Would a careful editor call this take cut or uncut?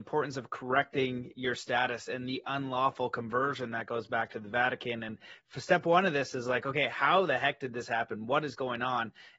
uncut